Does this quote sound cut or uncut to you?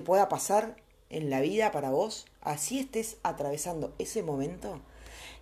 uncut